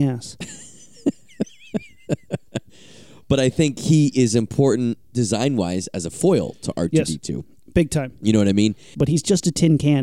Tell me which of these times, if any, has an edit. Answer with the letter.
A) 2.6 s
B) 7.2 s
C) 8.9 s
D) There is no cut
C